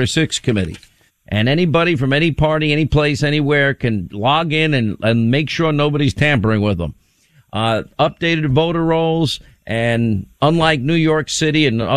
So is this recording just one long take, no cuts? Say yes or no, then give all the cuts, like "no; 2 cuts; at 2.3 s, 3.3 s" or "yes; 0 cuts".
no; 2 cuts; at 1.1 s, 10.3 s